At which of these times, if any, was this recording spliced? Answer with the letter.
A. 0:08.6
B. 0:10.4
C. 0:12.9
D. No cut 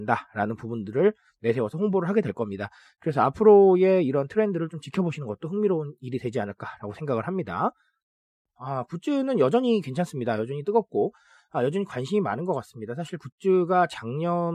A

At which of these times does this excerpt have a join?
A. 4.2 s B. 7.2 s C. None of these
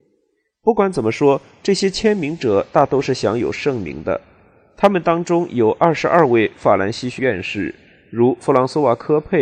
B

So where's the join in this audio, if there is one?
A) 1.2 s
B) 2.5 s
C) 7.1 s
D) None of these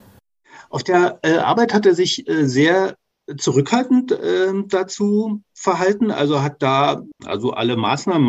C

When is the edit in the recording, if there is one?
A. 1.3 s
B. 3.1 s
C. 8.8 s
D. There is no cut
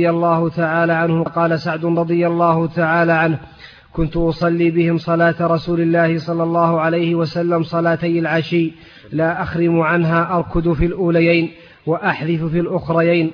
A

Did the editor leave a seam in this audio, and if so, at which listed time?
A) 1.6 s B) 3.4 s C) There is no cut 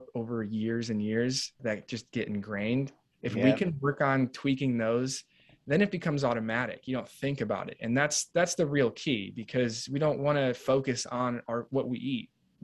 A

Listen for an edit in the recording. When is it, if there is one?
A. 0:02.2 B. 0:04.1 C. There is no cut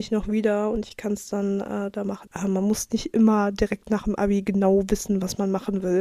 A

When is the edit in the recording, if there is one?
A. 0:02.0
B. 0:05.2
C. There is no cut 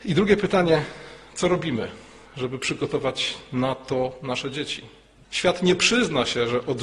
B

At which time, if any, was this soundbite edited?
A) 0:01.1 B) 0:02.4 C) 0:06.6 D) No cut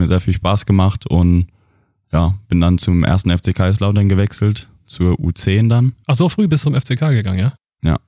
C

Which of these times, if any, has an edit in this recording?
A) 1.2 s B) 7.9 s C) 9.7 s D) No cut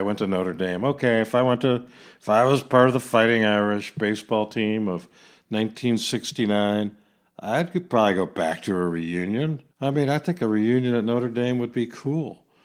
C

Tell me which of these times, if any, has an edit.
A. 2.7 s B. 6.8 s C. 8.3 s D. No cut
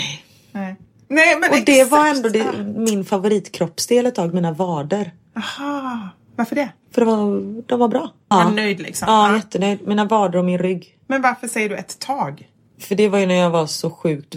C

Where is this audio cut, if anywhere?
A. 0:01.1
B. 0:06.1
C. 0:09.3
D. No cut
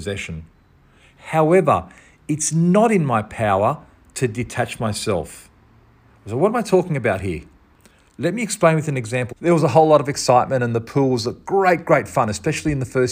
C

